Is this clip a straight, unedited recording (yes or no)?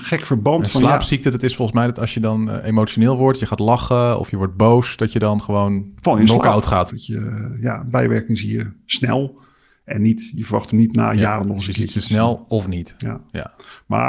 no